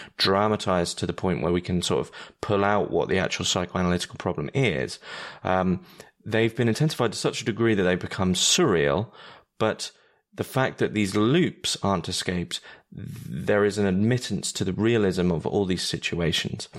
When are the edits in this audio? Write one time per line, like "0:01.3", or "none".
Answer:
none